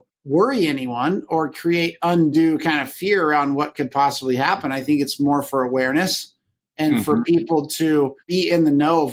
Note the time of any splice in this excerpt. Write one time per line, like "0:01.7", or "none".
none

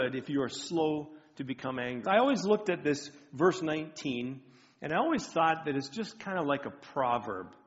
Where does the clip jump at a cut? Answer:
0:02.0

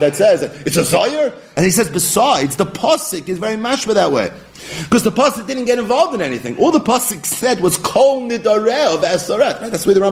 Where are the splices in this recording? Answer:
0:01.5

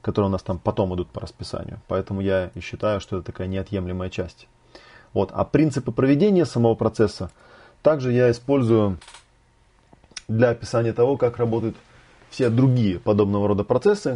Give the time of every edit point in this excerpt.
none

